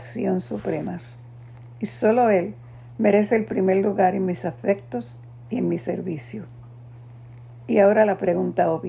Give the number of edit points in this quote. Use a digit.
0